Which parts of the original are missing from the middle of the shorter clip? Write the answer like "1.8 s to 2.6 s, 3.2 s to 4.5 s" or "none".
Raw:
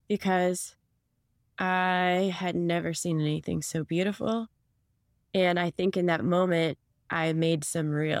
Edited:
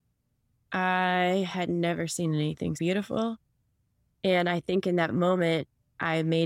3.6 s to 3.9 s